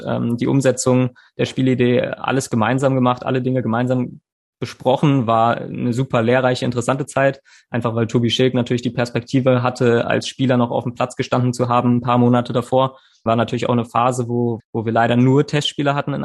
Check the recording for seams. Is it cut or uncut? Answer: cut